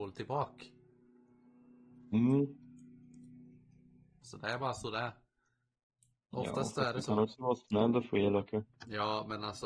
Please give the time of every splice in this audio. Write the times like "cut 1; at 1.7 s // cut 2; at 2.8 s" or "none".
cut 1; at 4.2 s